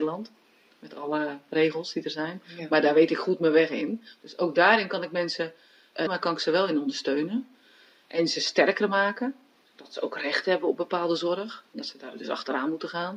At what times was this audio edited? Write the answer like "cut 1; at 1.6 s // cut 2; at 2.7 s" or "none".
cut 1; at 6.1 s